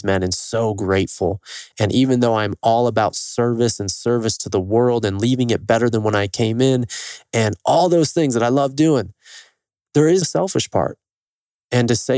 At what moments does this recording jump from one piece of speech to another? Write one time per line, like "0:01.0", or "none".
0:01.7
0:10.2